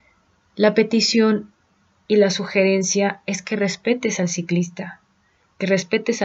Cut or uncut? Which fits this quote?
uncut